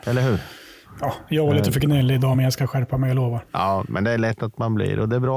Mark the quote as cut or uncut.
uncut